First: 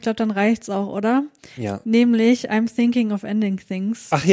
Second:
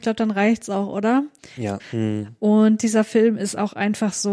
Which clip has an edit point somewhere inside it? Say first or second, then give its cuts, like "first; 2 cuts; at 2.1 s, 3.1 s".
second; 1 cut; at 1.8 s